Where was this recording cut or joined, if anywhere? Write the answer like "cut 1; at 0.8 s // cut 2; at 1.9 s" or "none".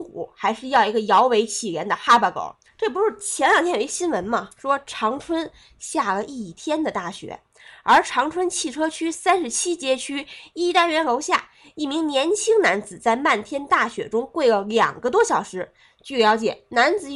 cut 1; at 2.7 s